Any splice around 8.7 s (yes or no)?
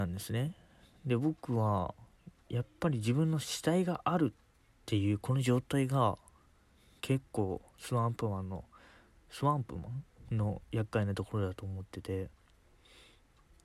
no